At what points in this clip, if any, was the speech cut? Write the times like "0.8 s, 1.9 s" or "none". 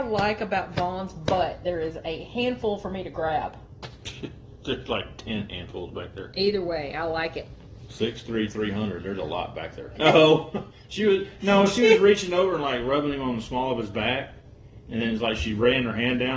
10.0 s